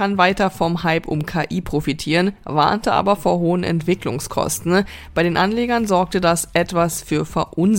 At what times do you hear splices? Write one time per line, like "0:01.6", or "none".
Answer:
none